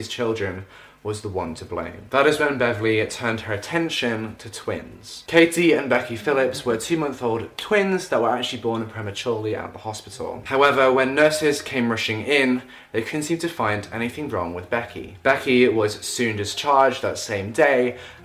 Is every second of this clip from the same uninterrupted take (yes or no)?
no